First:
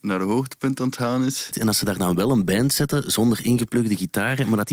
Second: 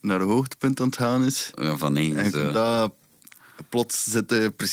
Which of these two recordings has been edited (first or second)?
first